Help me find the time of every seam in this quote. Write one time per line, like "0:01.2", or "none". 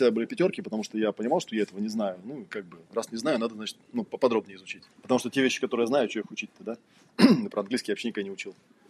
0:04.9